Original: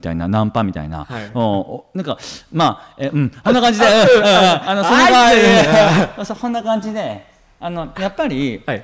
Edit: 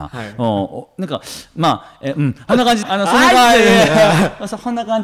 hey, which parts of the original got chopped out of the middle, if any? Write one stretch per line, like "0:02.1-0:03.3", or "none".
0:03.8-0:04.6